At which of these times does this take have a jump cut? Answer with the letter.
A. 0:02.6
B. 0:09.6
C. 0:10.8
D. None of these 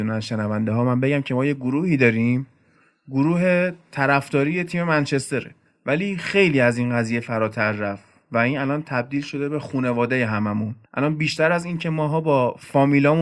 C